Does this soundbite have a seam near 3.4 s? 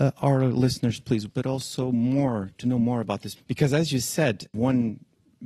yes; 2 cuts; at 1.3 s, 3.4 s

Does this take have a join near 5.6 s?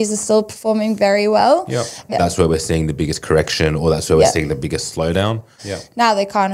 yes; 2 cuts; at 2.1 s, 5.6 s

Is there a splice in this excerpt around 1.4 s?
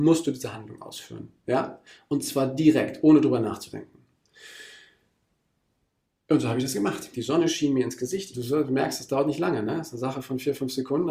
no; 2 cuts; at 7.1 s, 8.3 s

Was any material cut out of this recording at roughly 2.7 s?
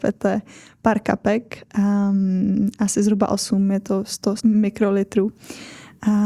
no; 1 cut; at 4.4 s

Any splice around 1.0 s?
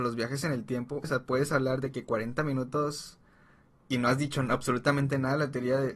yes; 1 cut; at 1.0 s

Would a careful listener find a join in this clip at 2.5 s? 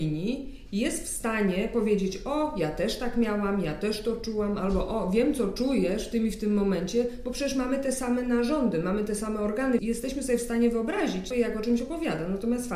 no; 2 cuts; at 9.8 s, 11.3 s

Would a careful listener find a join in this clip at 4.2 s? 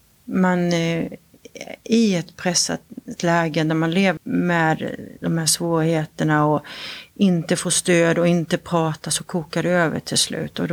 yes; 1 cut; at 4.2 s

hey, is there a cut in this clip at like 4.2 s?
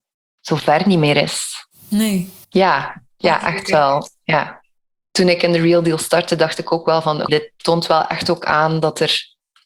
no; 2 cuts; at 2.4 s, 7.3 s

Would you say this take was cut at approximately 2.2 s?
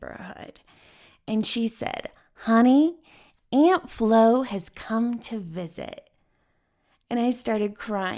no; 0 cuts

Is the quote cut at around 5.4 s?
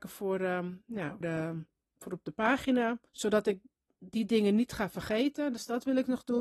no; 2 cuts; at 1.2 s, 3.1 s

